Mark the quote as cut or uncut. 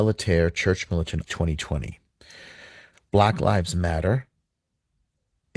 cut